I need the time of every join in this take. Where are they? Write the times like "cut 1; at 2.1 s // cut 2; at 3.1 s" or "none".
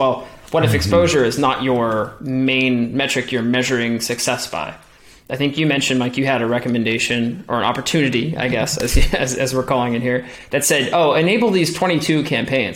none